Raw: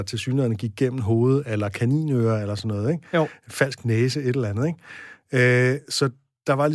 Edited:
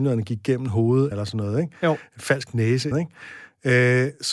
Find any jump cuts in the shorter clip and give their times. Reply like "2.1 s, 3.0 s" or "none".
1.1 s, 2.9 s